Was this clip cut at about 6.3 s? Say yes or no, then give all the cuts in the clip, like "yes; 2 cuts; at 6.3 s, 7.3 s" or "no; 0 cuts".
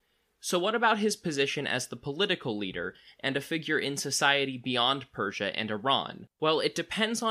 yes; 1 cut; at 6.3 s